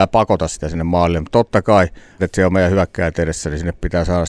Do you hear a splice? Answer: yes; 1 cut; at 2.2 s

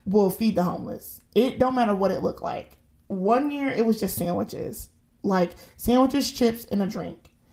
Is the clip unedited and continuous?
yes; 0 cuts

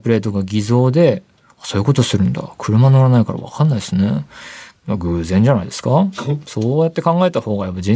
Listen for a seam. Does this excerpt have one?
yes; 1 cut; at 4.8 s

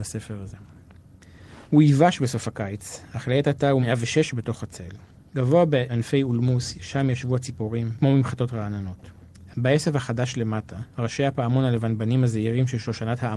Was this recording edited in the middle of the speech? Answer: yes; 3 cuts; at 1.7 s, 7.9 s, 9.5 s

